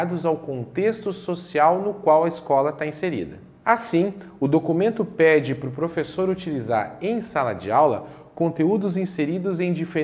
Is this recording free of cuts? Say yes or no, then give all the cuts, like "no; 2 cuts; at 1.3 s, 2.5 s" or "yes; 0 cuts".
no; 1 cut; at 3.6 s